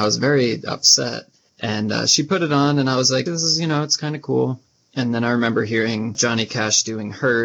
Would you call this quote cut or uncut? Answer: cut